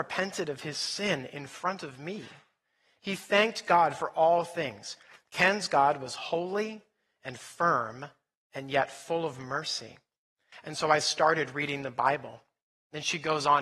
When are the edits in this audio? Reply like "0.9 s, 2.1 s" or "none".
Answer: 10.5 s